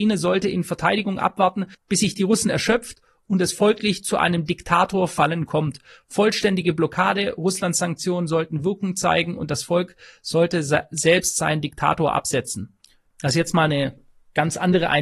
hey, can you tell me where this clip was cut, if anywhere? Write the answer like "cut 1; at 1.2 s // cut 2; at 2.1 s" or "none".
cut 1; at 13.1 s